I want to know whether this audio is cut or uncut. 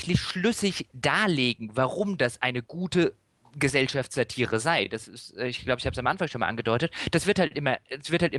uncut